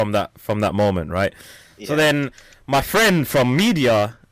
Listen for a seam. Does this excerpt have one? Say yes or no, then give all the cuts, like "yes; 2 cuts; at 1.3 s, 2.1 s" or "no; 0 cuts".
no; 0 cuts